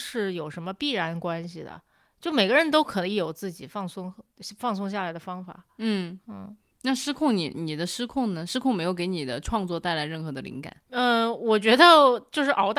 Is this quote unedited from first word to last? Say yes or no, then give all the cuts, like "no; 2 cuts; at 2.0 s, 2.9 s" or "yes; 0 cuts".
yes; 0 cuts